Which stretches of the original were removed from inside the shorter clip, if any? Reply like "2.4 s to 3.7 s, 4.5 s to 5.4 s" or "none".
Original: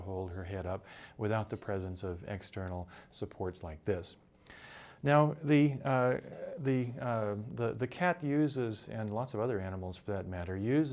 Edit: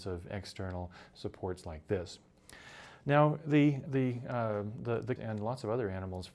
5.8 s to 6.6 s, 7.9 s to 8.9 s